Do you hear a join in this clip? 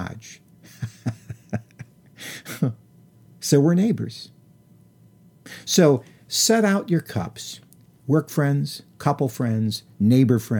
no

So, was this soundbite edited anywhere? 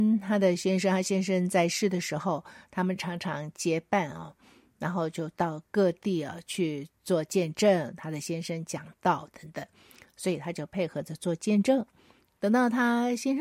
no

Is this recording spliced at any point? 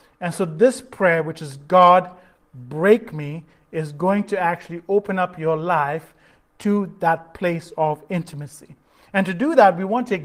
no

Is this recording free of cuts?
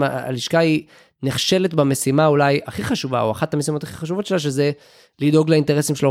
yes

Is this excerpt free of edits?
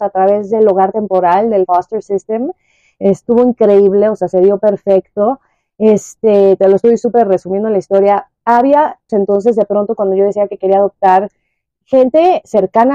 no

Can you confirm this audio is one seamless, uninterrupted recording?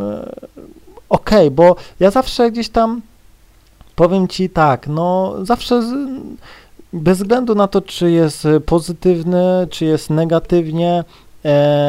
yes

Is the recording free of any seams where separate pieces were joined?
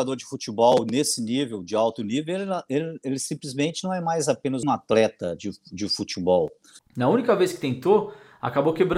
no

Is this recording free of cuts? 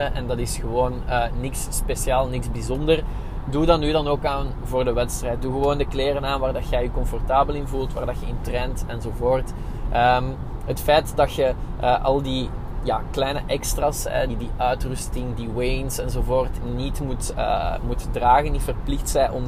no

